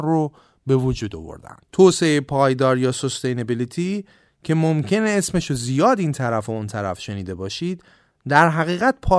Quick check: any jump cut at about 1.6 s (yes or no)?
yes